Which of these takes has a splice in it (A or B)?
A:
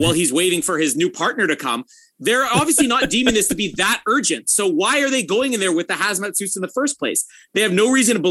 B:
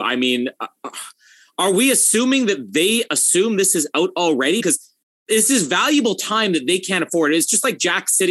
B